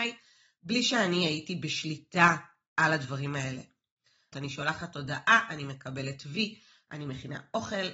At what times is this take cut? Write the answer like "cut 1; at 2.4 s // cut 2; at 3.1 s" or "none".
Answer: cut 1; at 4.3 s